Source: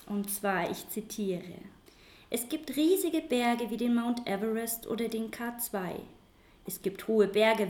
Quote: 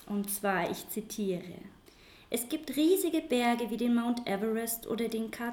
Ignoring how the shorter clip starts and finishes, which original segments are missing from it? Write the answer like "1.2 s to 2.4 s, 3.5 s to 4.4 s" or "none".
none